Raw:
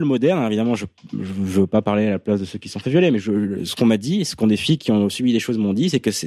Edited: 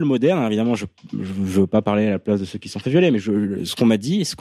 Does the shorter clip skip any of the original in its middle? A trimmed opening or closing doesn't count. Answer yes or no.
no